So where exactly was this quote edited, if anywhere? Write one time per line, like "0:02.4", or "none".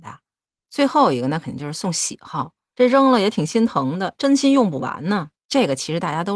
0:02.7
0:04.1
0:05.3